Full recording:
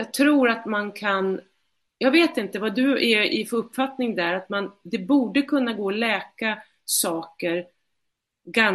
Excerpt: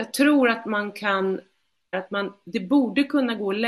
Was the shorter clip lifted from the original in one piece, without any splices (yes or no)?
no